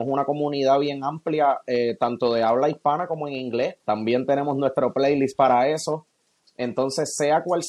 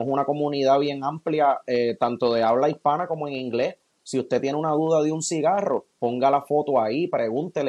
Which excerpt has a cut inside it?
first; 1 cut; at 3.8 s

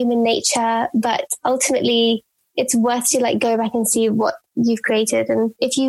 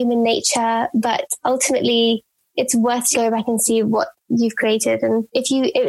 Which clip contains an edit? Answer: second; 1 cut; at 3.1 s

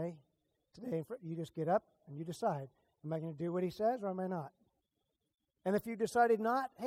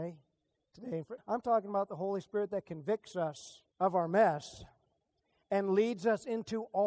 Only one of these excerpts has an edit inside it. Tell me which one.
second; 2 cuts; at 1.2 s, 3.7 s

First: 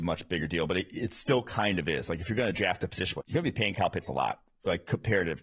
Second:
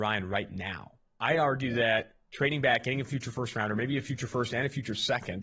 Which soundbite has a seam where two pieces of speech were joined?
first; 1 cut; at 3.2 s

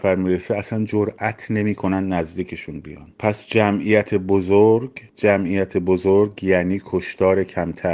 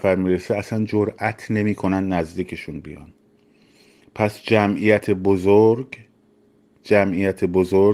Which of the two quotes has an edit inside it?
first; 2 cuts; at 3.1 s, 5.1 s

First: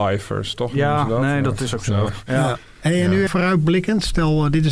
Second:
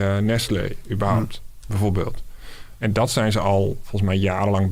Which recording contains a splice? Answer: first; 1 cut; at 3.3 s

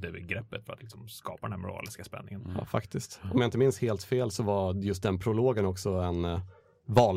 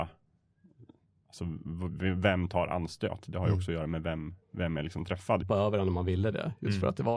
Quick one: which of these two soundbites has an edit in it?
second; 2 cuts; at 4.4 s, 5.4 s

